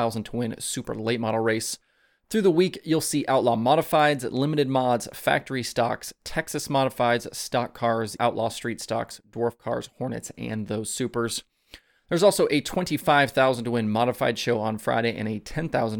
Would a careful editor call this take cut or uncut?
cut